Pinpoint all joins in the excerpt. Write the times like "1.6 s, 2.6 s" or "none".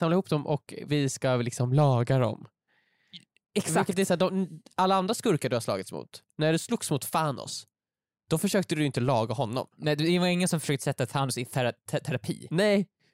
none

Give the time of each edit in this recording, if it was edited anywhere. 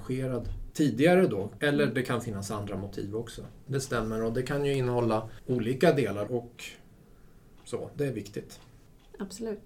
1.6 s, 3.7 s, 6.3 s

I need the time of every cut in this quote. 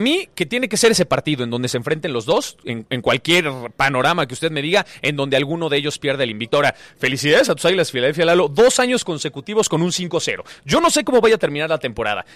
none

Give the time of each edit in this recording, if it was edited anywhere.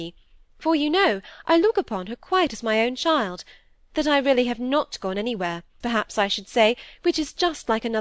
5.8 s

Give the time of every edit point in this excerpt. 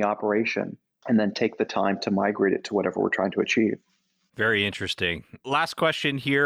none

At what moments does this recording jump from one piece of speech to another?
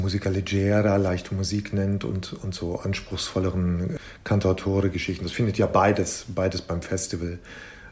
none

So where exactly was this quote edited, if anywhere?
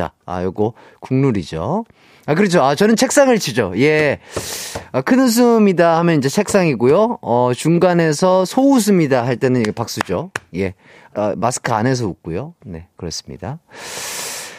11.1 s

